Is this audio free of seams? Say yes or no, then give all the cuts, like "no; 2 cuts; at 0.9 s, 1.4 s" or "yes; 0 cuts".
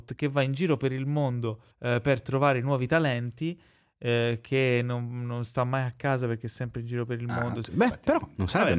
no; 2 cuts; at 1.7 s, 7.6 s